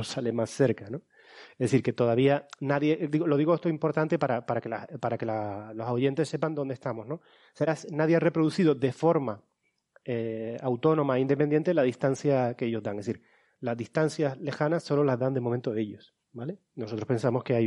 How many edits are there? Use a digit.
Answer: 2